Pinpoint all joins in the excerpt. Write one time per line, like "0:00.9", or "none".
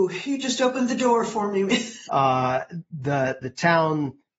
0:02.0